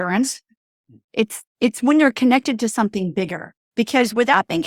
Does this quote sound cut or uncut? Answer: cut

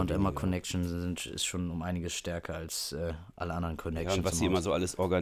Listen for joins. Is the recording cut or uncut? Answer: uncut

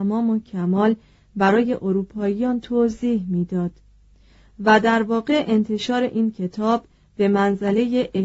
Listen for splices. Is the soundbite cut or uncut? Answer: uncut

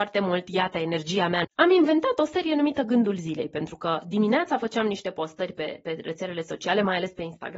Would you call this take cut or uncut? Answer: cut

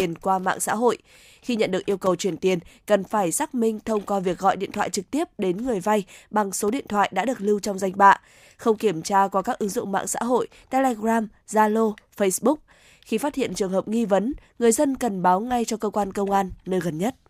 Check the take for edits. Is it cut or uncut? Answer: uncut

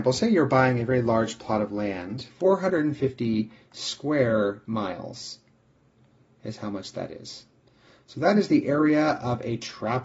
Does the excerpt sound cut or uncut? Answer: cut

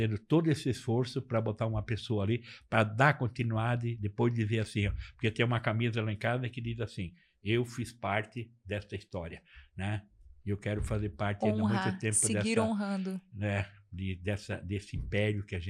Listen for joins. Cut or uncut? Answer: uncut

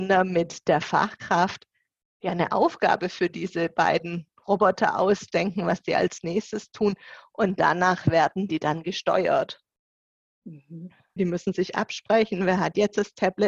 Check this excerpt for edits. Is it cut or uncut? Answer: cut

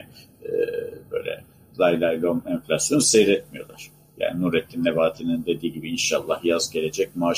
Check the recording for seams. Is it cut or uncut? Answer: uncut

